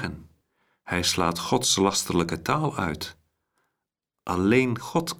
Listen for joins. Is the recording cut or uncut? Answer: uncut